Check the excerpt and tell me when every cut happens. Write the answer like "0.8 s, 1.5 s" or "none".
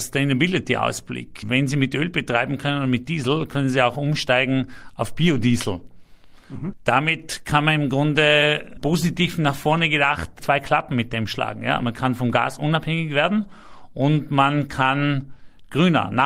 none